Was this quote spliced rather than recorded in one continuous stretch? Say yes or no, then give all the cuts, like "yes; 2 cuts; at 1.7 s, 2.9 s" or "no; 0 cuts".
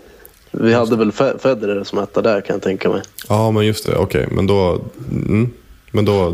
no; 0 cuts